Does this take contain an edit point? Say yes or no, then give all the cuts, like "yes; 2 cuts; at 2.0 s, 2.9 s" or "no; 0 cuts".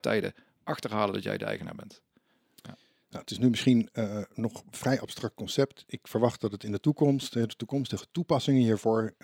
no; 0 cuts